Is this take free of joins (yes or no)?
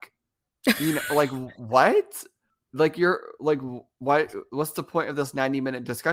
yes